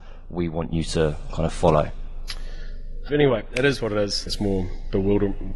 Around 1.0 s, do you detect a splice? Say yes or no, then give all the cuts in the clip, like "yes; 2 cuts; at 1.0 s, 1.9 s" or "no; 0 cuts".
no; 2 cuts; at 3.1 s, 4.3 s